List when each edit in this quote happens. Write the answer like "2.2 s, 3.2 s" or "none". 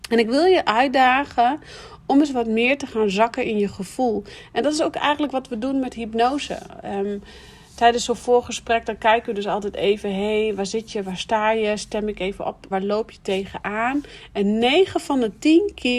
12.7 s